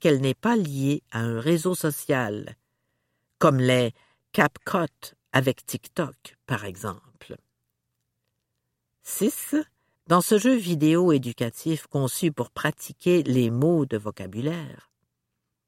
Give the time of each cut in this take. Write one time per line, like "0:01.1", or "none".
0:09.9